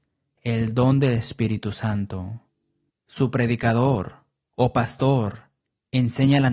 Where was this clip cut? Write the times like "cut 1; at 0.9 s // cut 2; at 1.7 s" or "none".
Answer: cut 1; at 2.9 s